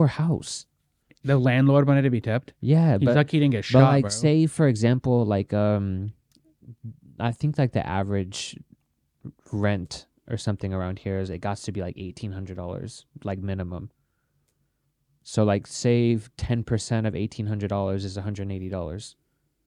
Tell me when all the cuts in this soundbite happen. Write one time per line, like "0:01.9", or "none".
none